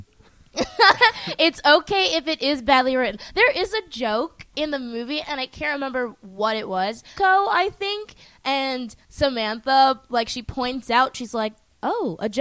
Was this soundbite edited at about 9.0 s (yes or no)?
yes